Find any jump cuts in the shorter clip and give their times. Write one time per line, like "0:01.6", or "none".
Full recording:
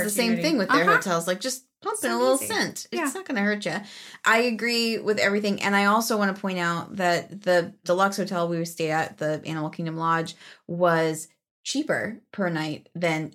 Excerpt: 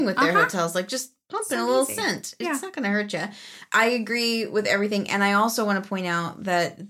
none